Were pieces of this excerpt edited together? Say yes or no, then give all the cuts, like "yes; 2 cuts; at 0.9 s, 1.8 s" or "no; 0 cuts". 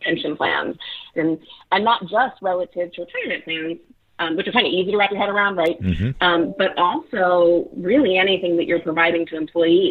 yes; 2 cuts; at 1.1 s, 5.8 s